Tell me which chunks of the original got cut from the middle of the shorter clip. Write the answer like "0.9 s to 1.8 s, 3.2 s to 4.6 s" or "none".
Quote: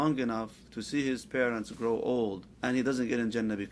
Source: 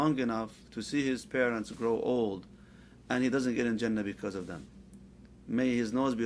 2.5 s to 3.0 s